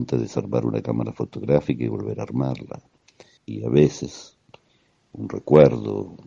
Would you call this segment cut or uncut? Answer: cut